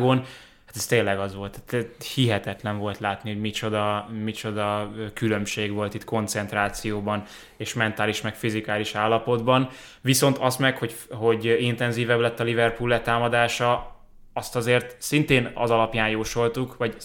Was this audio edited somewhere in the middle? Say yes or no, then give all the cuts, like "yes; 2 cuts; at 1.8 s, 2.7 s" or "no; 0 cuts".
no; 0 cuts